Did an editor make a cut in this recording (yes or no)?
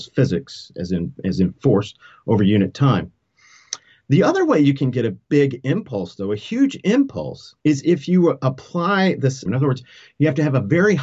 yes